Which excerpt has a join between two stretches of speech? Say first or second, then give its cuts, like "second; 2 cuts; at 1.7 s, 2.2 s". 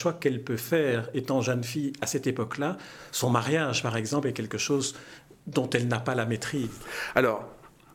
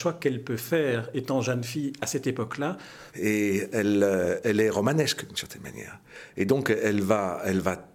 second; 1 cut; at 3.1 s